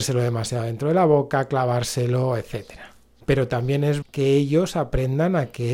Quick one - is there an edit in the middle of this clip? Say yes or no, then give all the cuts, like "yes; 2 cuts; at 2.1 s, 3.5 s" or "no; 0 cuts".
yes; 1 cut; at 4.0 s